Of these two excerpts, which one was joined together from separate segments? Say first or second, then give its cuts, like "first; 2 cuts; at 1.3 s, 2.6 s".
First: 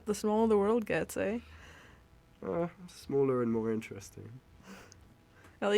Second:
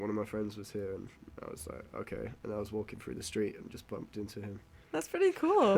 second; 1 cut; at 4.8 s